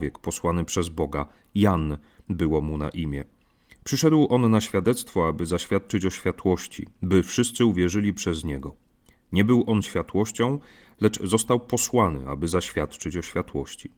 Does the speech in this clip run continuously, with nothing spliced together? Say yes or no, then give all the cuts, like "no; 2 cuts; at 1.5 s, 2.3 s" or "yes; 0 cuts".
yes; 0 cuts